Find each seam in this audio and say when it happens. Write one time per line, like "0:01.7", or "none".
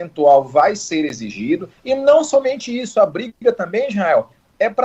none